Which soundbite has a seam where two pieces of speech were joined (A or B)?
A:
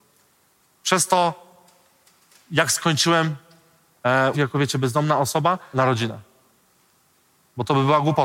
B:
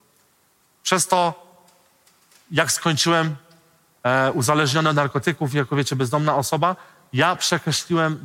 A